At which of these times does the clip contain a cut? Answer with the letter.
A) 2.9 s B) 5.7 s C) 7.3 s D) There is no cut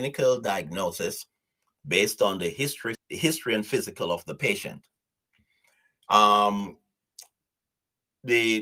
A